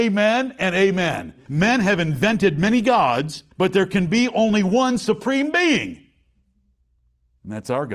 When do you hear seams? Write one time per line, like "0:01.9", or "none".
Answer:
0:01.5
0:03.5

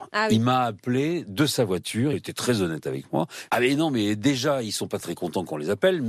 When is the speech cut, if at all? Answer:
0:02.1
0:03.5
0:05.0

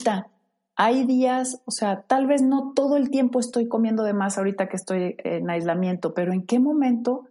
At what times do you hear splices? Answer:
none

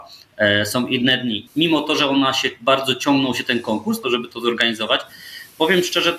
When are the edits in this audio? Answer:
0:01.5
0:04.0

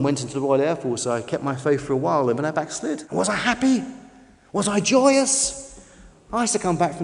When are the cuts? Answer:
0:03.0

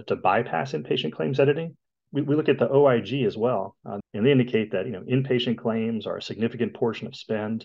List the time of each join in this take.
0:01.9
0:04.0

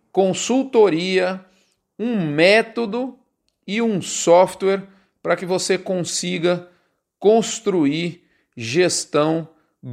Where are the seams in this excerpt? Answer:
none

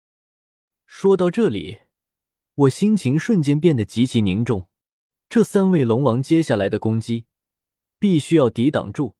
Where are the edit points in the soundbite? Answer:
none

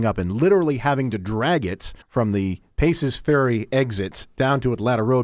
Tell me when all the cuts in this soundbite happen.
0:02.0

